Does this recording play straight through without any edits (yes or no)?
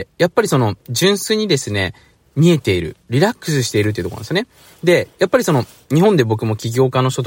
yes